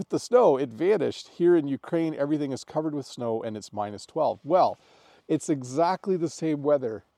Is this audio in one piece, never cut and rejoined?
yes; 0 cuts

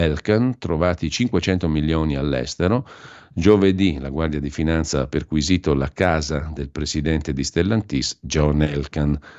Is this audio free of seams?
yes; 0 cuts

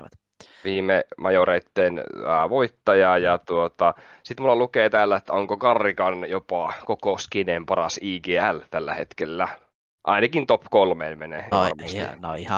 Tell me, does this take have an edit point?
yes; 2 cuts; at 10.0 s, 11.5 s

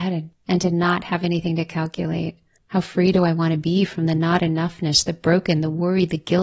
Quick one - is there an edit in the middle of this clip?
yes; 1 cut; at 2.6 s

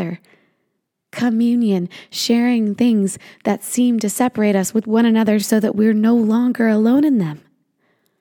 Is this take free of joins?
yes; 0 cuts

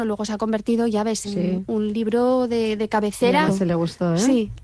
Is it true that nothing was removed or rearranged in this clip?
no; 2 cuts; at 1.2 s, 3.5 s

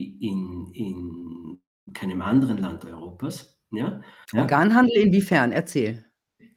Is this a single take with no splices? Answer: no; 1 cut; at 4.2 s

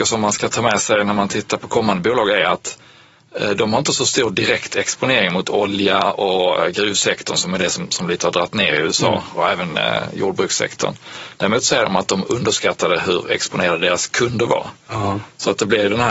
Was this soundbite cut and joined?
no; 0 cuts

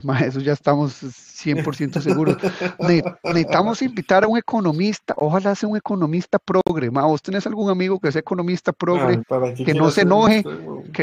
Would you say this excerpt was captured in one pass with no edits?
no; 1 cut; at 9.2 s

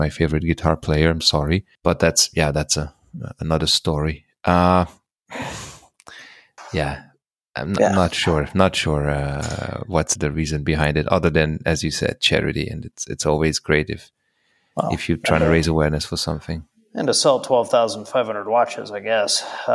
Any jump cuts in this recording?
yes; 2 cuts; at 1.8 s, 10.2 s

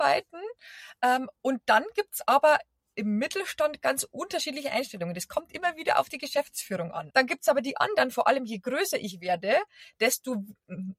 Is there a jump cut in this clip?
yes; 1 cut; at 7.1 s

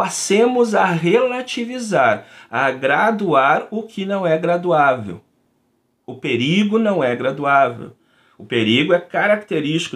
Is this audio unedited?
yes; 0 cuts

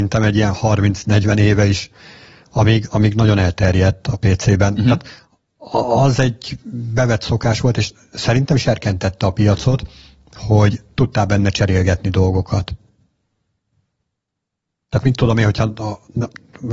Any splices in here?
no; 0 cuts

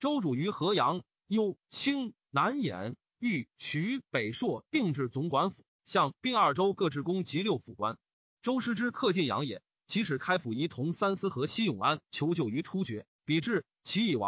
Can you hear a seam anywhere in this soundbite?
no; 0 cuts

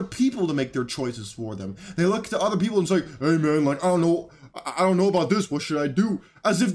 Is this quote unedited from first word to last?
yes; 0 cuts

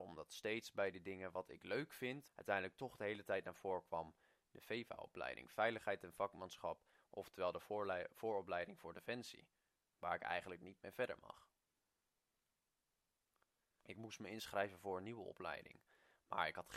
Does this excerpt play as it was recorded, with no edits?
no; 2 cuts; at 2.3 s, 13.8 s

